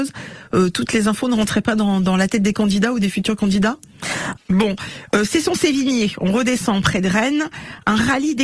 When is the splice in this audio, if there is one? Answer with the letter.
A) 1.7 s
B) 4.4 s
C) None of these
B